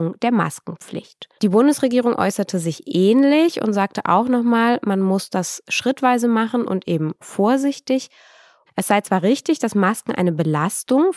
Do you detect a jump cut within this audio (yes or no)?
yes